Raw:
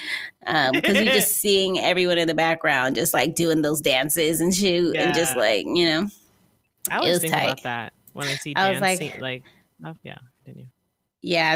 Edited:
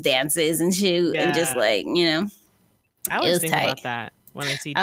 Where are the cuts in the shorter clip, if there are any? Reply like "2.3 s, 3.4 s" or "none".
none